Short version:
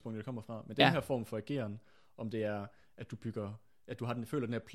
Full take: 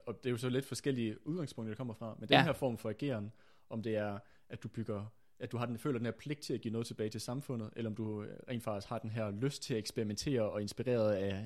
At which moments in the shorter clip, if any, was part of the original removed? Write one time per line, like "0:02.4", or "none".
none